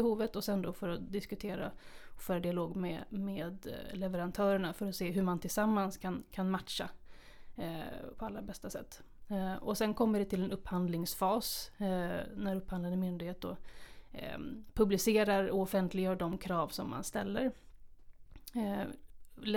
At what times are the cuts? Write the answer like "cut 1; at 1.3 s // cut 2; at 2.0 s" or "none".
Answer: cut 1; at 8.1 s